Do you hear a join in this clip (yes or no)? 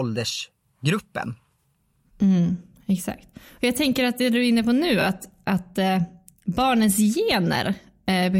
no